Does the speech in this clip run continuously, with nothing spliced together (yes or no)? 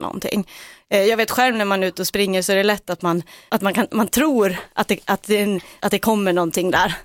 no